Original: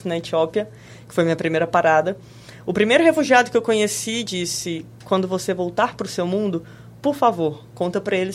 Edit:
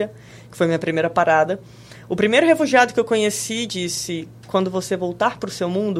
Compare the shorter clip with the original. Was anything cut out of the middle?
no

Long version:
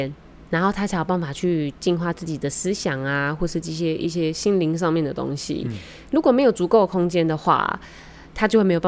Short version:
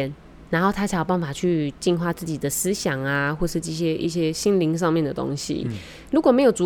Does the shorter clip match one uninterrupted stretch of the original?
yes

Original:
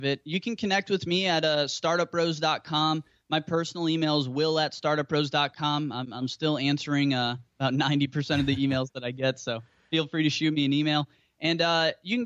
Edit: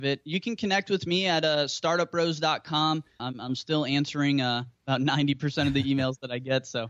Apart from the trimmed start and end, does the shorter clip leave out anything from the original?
yes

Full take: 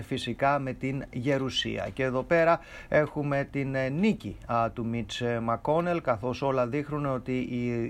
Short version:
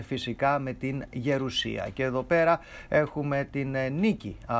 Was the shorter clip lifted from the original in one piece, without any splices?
yes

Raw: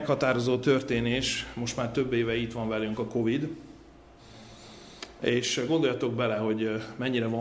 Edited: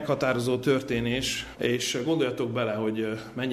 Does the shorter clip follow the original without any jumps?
no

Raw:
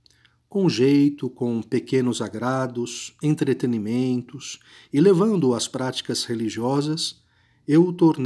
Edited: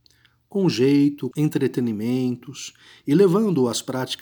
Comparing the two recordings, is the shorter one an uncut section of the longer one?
no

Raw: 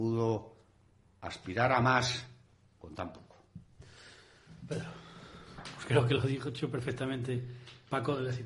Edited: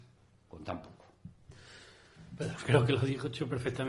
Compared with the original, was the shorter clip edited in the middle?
yes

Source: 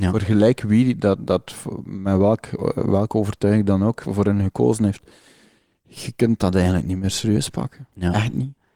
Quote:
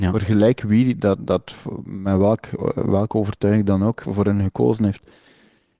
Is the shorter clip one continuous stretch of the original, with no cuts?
yes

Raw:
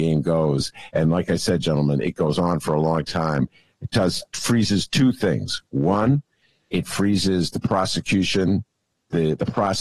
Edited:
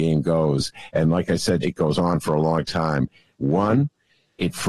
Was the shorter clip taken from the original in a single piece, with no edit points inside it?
no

